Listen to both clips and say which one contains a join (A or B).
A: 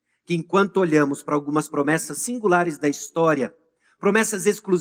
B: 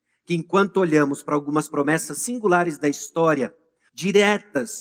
B